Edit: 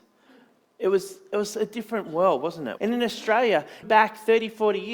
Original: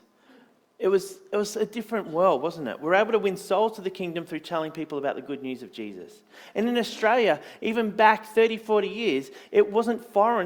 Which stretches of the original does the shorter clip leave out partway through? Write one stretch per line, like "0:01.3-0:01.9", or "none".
0:02.8-0:06.5
0:07.6-0:07.9